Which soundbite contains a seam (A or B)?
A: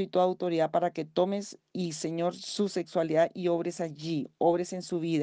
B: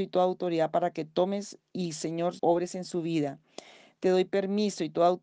B